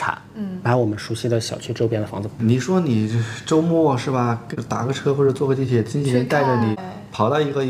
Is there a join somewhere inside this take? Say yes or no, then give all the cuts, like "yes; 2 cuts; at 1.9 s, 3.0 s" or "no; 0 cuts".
no; 0 cuts